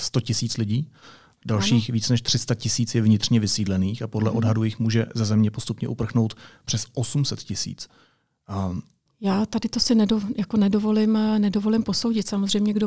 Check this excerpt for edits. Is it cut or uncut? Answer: cut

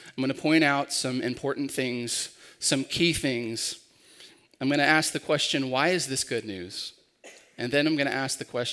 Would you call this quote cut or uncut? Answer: uncut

